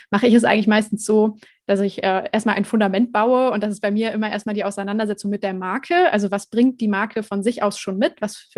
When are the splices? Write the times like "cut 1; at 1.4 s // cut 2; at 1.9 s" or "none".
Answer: none

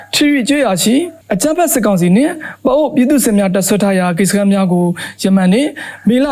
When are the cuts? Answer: cut 1; at 1.2 s

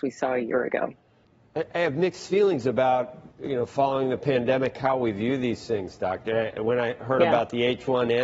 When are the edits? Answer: none

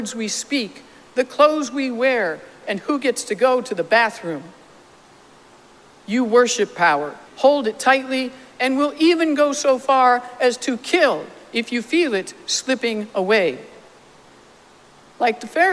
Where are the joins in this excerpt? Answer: cut 1; at 2.6 s // cut 2; at 7.3 s

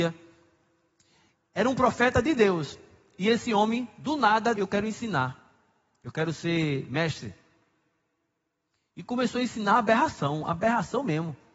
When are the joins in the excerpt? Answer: cut 1; at 4.5 s

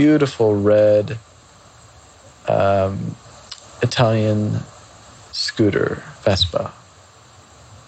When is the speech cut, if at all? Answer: cut 1; at 6.2 s

